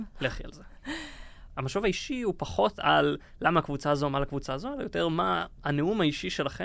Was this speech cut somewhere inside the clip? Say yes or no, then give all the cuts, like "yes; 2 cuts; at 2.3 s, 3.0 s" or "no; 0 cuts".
yes; 1 cut; at 1.5 s